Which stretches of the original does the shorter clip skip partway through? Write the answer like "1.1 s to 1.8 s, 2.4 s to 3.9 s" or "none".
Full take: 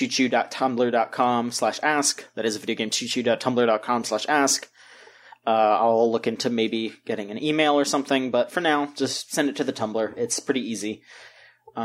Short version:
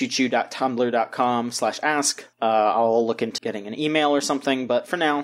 2.3 s to 5.4 s, 6.4 s to 7.0 s